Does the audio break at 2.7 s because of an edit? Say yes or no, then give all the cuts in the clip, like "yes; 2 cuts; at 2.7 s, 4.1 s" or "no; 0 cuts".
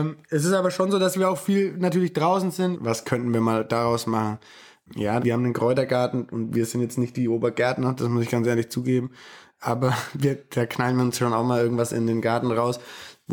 yes; 2 cuts; at 2.7 s, 5.2 s